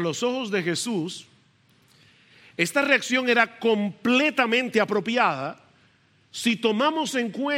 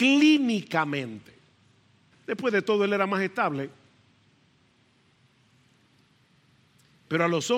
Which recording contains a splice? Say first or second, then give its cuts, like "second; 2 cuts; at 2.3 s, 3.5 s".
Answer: second; 1 cut; at 2.1 s